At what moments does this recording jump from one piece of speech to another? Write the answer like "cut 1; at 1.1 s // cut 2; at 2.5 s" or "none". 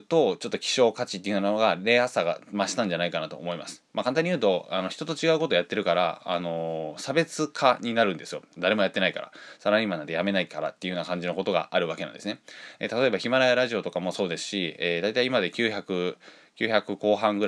none